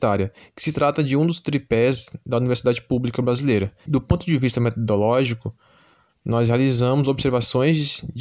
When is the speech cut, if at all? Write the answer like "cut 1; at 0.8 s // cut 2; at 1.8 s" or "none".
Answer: cut 1; at 3.9 s